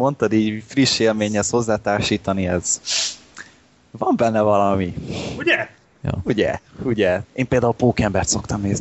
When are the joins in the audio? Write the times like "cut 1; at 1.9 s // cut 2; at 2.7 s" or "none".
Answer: cut 1; at 7.2 s